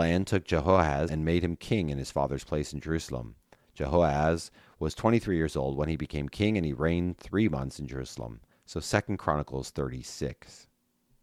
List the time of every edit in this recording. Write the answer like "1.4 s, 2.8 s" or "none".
1.1 s, 8.5 s